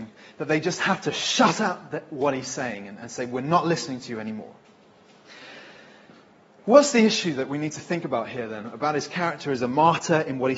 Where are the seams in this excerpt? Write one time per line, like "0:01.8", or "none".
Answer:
none